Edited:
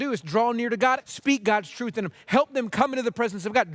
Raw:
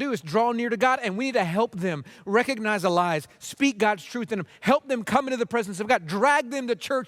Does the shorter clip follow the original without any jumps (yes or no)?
no